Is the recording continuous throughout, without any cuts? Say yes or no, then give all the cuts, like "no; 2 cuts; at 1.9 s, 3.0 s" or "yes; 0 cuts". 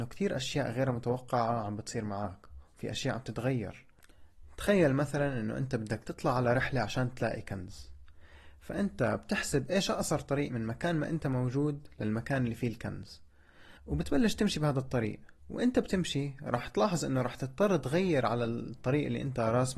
no; 2 cuts; at 13.8 s, 15.4 s